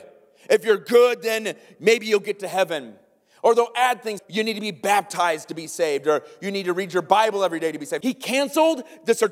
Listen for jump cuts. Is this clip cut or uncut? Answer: cut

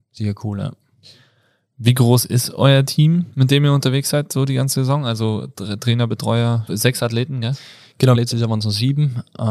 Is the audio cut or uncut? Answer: cut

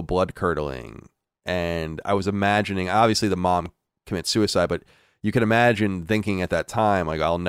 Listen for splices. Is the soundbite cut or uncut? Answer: uncut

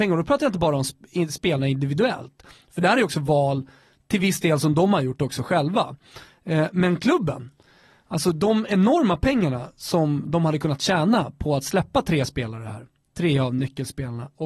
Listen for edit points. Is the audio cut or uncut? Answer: uncut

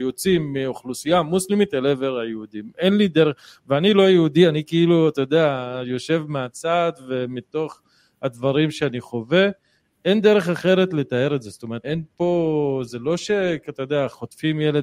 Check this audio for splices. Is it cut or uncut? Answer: cut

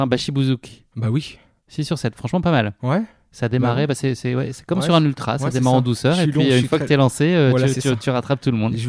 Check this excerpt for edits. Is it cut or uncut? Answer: uncut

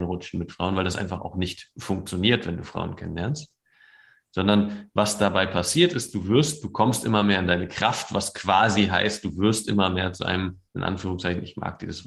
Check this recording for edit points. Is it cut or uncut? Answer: uncut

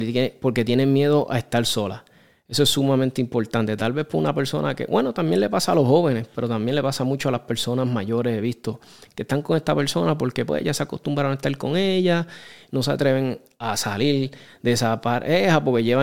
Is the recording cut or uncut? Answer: uncut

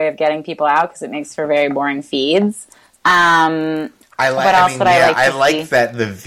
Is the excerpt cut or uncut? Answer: uncut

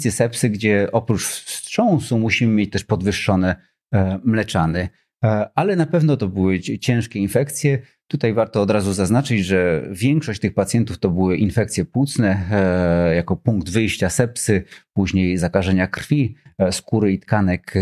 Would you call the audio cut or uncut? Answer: uncut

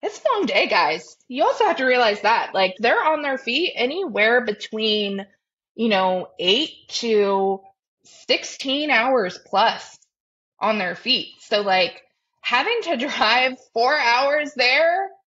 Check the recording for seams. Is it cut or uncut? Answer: cut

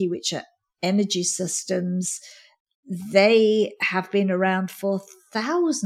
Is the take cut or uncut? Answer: uncut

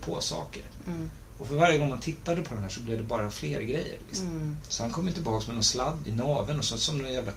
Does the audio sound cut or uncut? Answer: cut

